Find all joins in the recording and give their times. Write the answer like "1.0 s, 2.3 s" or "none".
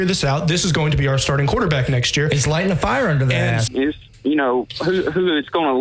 3.7 s